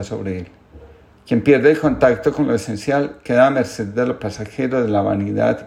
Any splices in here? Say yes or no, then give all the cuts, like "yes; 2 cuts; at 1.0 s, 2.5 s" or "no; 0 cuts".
yes; 1 cut; at 1.1 s